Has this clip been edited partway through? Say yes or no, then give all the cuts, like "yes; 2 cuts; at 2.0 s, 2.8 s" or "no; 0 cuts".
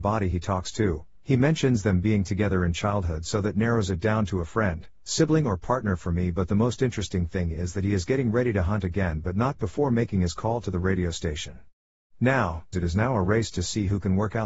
yes; 1 cut; at 12.7 s